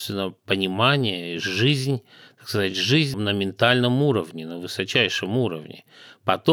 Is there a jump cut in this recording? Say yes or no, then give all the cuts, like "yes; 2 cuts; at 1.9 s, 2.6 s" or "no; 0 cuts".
no; 0 cuts